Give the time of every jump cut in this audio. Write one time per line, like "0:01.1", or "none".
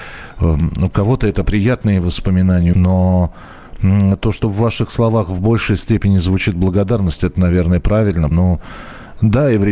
0:02.7
0:08.3